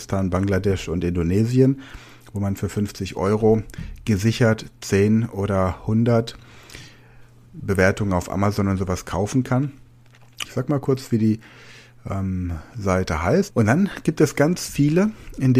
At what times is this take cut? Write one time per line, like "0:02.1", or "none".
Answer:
0:10.4
0:13.5